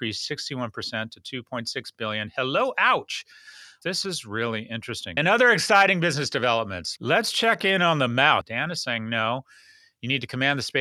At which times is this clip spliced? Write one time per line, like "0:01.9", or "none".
0:03.8
0:05.2
0:08.4